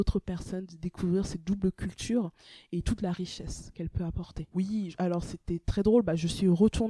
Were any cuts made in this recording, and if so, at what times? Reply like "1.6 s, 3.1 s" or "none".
4.5 s